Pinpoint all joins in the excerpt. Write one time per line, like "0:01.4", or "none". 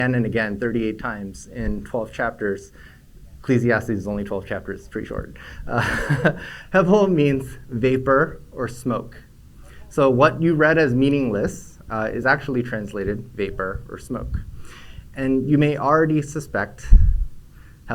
none